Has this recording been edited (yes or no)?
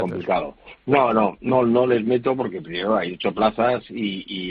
no